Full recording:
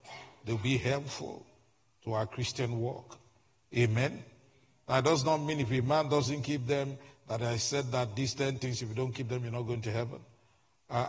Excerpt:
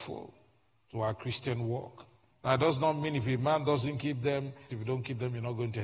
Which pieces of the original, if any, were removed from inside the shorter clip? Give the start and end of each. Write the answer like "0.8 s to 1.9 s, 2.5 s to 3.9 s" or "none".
3.4 s to 4.8 s, 7.1 s to 8.8 s